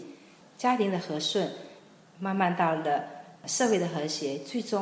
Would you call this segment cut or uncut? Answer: uncut